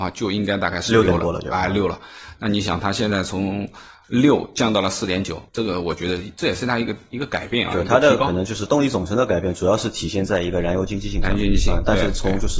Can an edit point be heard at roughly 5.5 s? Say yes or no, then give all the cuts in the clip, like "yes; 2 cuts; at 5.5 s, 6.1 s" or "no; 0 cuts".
yes; 1 cut; at 5.5 s